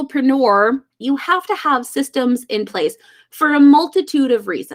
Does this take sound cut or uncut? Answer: cut